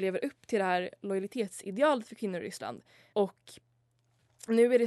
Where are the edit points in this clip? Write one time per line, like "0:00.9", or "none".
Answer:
0:03.1